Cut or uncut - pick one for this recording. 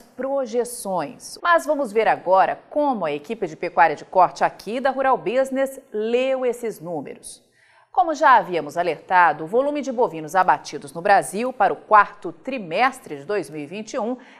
cut